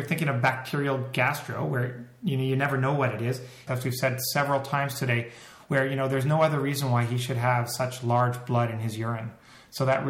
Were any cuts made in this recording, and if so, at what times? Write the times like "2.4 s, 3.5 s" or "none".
3.7 s